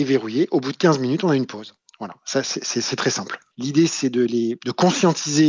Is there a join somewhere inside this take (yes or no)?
yes